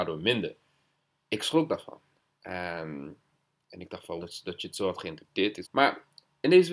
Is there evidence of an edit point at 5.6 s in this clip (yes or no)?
yes